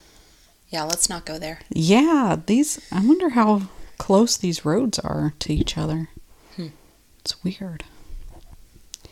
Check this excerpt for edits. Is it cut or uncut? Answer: uncut